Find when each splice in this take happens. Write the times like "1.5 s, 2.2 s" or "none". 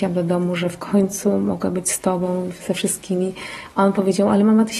none